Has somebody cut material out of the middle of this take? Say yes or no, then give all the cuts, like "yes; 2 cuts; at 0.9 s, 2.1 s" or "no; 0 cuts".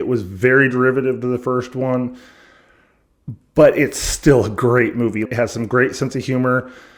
yes; 1 cut; at 5.3 s